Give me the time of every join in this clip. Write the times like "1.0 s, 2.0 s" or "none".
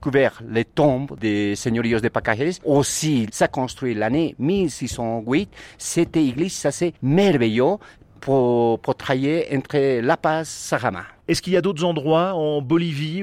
3.3 s

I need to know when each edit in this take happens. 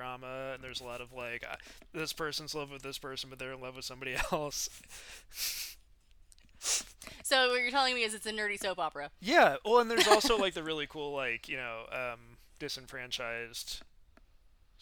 none

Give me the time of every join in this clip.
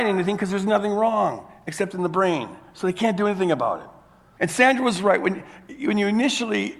4.4 s

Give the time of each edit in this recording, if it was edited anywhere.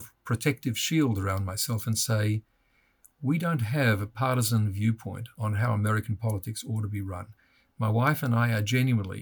none

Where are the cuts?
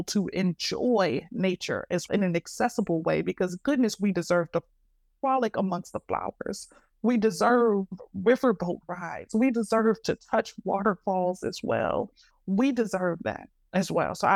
2.1 s, 12.3 s

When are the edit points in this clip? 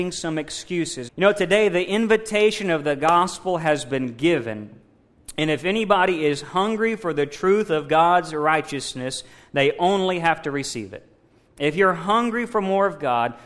1.1 s

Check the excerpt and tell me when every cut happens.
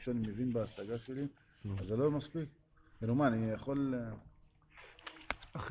none

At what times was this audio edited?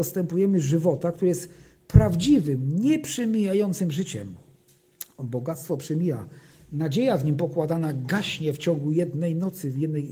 none

